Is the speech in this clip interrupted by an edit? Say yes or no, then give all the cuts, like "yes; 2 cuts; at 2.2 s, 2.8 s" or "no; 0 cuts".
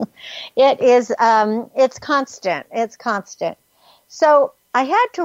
no; 0 cuts